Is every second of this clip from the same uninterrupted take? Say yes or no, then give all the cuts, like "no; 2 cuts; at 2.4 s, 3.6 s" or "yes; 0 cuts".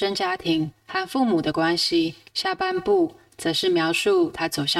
no; 1 cut; at 2.3 s